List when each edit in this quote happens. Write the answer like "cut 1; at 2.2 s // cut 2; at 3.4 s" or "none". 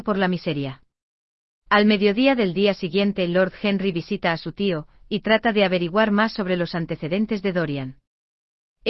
none